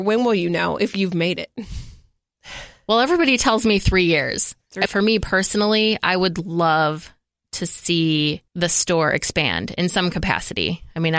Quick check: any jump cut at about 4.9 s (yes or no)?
yes